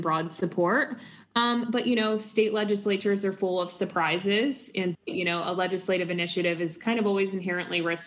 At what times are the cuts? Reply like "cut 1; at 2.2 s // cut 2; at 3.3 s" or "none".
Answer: cut 1; at 4.9 s